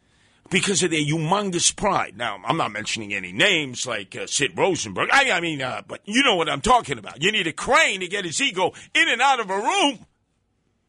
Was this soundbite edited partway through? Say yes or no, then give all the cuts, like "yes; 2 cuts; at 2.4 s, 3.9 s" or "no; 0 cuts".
no; 0 cuts